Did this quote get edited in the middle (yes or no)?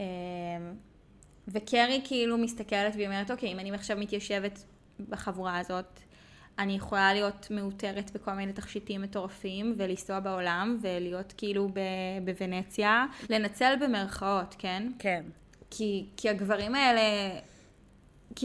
yes